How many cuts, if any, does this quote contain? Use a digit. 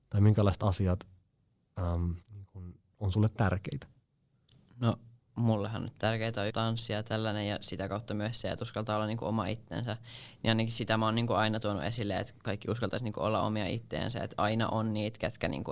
2